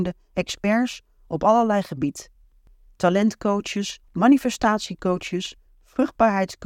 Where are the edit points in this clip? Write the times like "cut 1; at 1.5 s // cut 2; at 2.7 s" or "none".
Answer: cut 1; at 4.1 s